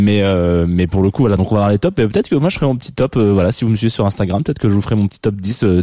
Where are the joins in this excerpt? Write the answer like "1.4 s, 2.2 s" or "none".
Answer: none